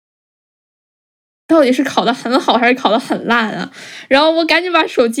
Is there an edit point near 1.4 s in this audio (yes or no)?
yes